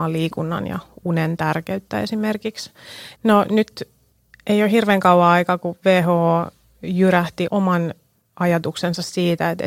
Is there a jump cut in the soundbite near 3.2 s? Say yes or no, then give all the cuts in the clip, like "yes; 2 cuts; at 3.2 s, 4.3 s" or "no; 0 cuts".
yes; 2 cuts; at 3.2 s, 7.5 s